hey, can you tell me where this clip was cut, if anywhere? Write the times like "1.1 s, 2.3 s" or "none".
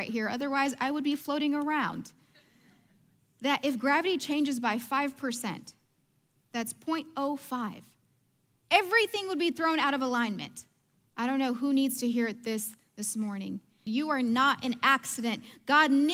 11.0 s, 13.9 s